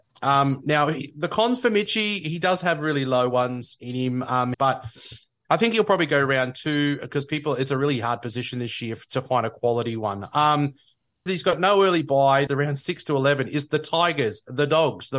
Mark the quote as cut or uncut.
cut